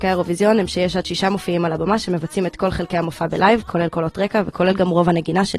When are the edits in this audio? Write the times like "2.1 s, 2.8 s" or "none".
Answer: none